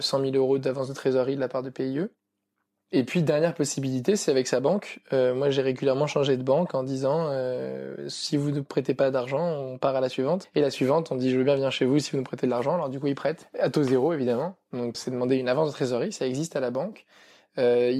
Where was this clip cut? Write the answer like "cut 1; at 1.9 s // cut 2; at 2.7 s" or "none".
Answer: cut 1; at 14.9 s